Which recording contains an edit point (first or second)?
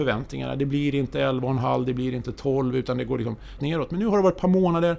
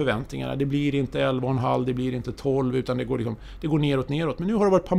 first